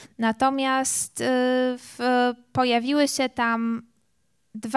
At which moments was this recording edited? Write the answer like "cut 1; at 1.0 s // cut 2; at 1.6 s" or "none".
none